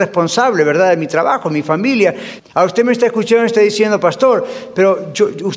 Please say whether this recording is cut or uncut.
cut